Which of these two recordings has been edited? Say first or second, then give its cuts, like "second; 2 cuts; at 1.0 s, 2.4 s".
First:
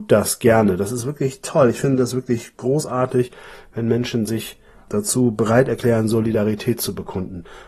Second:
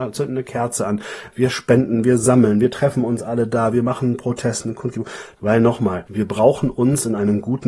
second; 1 cut; at 5.4 s